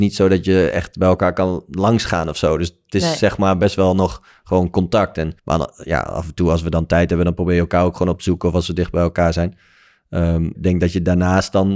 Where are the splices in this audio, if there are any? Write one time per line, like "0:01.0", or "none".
0:05.4
0:10.5